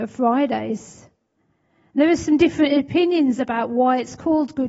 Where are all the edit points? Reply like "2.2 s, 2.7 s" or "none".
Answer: none